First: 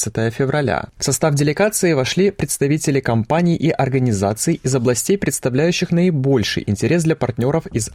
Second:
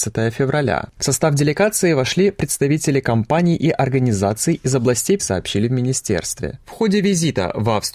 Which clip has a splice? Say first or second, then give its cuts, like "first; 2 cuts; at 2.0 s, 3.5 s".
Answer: second; 1 cut; at 5.2 s